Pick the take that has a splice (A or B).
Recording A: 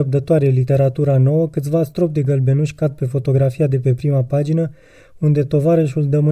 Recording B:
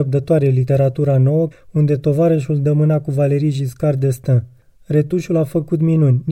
B